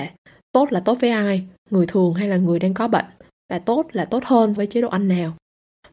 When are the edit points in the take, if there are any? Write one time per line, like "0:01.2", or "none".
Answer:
0:04.6